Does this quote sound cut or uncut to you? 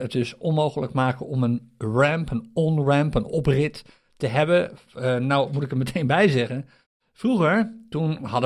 uncut